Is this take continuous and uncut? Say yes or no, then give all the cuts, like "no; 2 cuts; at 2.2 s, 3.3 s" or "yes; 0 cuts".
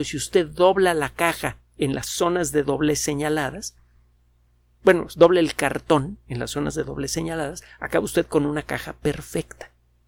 yes; 0 cuts